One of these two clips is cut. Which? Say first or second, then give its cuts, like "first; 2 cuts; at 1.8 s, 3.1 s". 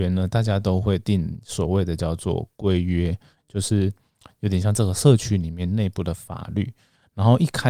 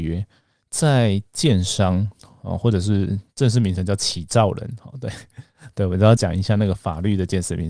second; 1 cut; at 6.2 s